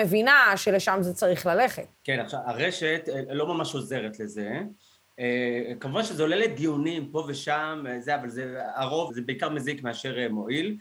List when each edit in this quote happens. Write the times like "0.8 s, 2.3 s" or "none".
1.9 s, 9.1 s